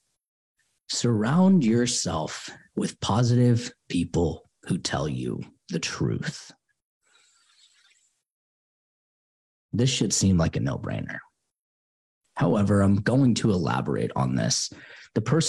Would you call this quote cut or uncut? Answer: uncut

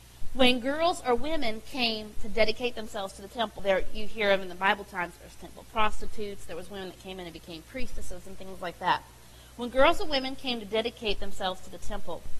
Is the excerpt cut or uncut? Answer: cut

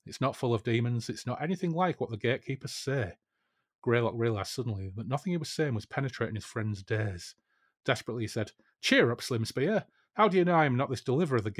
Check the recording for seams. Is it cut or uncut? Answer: uncut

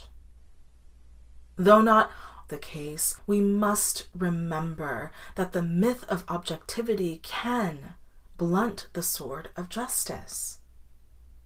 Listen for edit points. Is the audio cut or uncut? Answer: cut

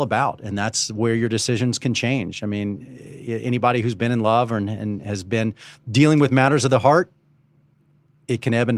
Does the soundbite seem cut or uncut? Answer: uncut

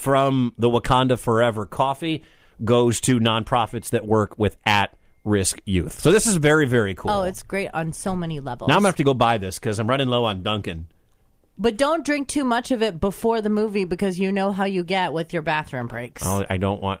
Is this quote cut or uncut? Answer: uncut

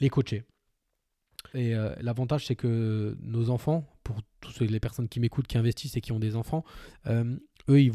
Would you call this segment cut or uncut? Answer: cut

